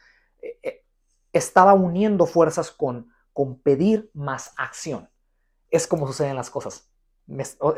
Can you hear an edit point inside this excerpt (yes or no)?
no